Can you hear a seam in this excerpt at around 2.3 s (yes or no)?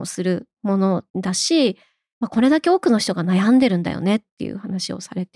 no